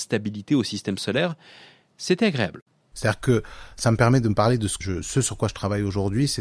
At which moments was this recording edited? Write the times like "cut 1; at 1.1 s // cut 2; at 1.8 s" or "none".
cut 1; at 2.9 s // cut 2; at 4.8 s